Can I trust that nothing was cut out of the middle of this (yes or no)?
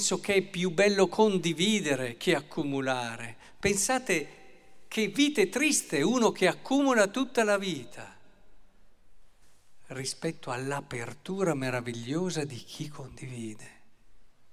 no